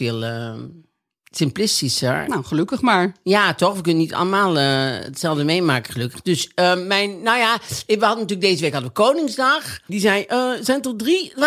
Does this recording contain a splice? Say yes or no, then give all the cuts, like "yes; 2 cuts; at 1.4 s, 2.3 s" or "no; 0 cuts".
yes; 1 cut; at 9.9 s